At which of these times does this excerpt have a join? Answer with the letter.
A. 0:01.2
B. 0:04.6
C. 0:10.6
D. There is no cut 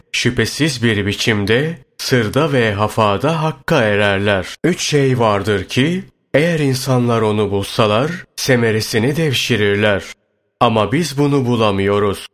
B